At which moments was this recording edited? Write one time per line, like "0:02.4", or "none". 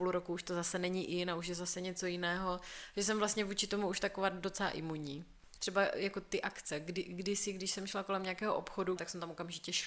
0:05.6
0:09.0